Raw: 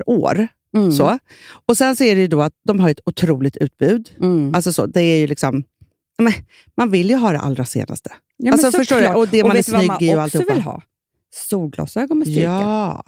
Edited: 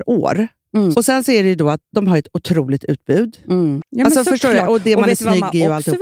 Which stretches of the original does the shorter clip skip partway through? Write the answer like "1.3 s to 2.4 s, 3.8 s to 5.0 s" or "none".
0.9 s to 1.6 s, 4.5 s to 8.3 s